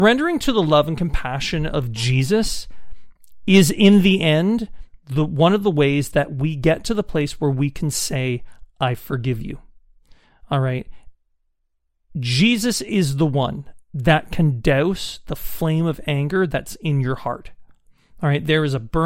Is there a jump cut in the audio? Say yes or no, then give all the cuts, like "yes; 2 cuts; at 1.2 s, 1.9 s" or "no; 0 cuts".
no; 0 cuts